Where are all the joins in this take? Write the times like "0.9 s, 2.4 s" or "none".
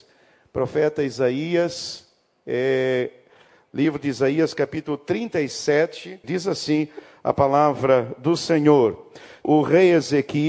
6.2 s, 9.4 s

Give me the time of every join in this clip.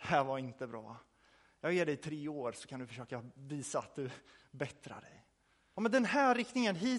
5.7 s

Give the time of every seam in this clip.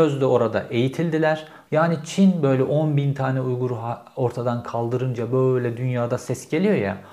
1.7 s

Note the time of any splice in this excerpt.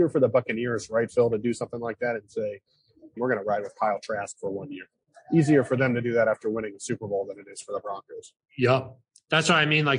3.2 s

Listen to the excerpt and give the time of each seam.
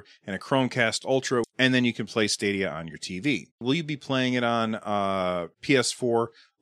1.4 s, 3.6 s

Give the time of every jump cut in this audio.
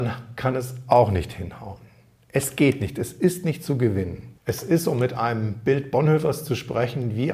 4.4 s

